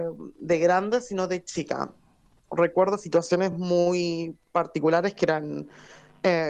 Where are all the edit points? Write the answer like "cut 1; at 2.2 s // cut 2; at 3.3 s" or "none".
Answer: none